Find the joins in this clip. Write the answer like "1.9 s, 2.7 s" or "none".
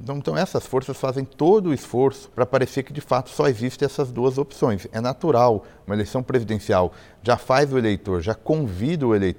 2.3 s